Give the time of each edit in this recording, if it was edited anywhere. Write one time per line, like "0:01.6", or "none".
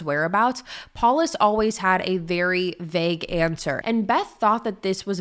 0:03.8